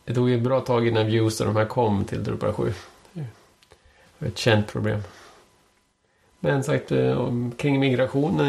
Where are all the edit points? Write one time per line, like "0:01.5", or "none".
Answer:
none